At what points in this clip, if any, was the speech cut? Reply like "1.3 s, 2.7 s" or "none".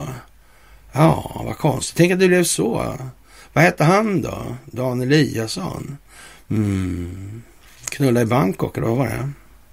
none